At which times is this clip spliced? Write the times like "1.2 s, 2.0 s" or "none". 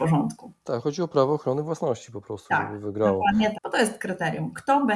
3.5 s